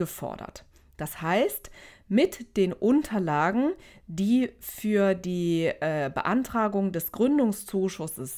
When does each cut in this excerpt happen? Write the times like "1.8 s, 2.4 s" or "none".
none